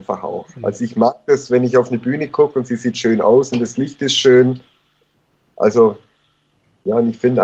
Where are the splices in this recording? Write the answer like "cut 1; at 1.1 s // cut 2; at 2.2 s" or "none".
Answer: none